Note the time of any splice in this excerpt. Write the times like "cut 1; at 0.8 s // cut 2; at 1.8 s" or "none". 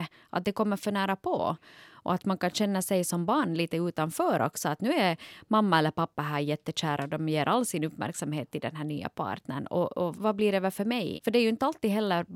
cut 1; at 10.1 s // cut 2; at 11.2 s